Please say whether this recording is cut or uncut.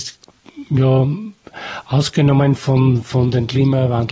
uncut